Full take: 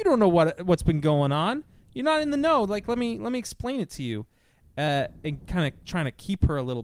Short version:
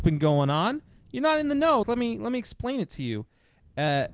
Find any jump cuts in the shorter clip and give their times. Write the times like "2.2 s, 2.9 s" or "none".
1.8 s

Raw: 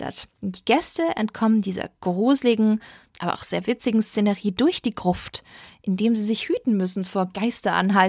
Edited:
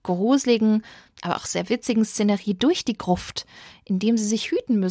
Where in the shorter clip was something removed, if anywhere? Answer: none

